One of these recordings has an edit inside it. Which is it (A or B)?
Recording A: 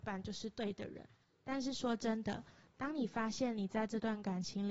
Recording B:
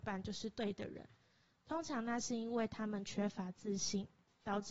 A